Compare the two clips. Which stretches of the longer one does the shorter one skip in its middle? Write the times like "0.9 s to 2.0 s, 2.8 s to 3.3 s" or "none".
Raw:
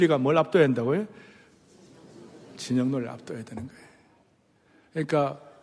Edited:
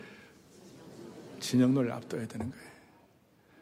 none